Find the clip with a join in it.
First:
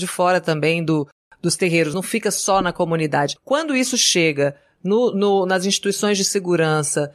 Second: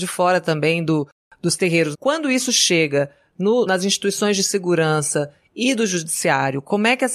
second; 2 cuts; at 1.9 s, 3.7 s

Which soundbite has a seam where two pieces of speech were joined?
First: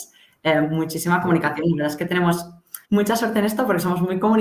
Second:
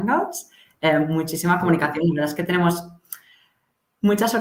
first; 1 cut; at 2.8 s

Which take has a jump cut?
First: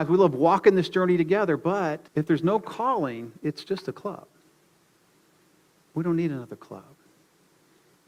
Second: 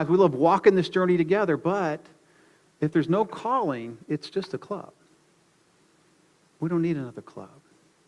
first; 1 cut; at 2.1 s

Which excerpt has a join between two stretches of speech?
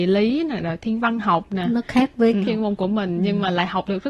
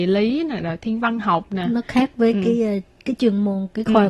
first; 1 cut; at 2.4 s

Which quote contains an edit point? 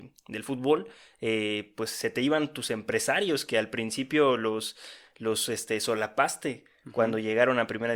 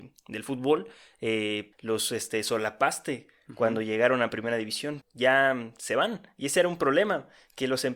second; 2 cuts; at 1.7 s, 5.0 s

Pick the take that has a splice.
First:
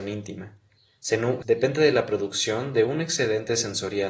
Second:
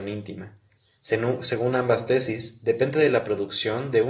first; 1 cut; at 1.4 s

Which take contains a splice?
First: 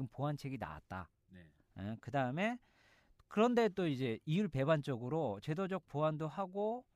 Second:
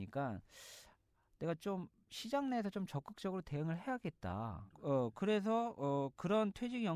second; 1 cut; at 4.7 s

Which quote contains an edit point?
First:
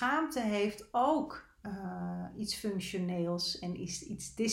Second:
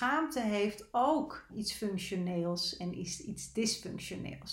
second; 1 cut; at 1.5 s

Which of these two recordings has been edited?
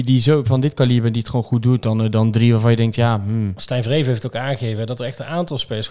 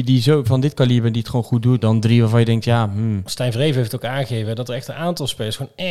second; 1 cut; at 1.8 s

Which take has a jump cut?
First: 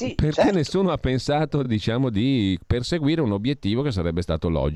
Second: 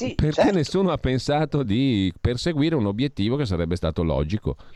second; 1 cut; at 1.6 s

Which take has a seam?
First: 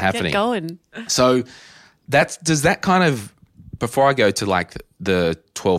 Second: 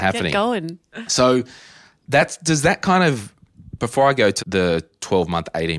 second; 1 cut; at 4.4 s

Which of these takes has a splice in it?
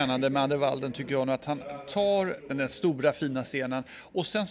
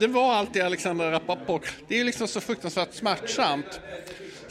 first; 1 cut; at 2.5 s

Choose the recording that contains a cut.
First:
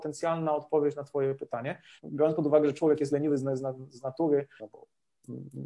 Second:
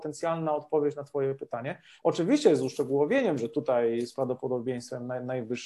first; 2 cuts; at 2.0 s, 4.6 s

